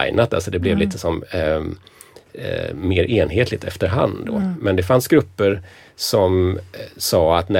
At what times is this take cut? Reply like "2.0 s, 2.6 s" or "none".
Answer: none